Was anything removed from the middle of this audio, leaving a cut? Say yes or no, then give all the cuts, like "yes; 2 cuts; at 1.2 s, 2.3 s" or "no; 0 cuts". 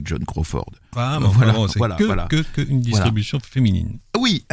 yes; 1 cut; at 0.9 s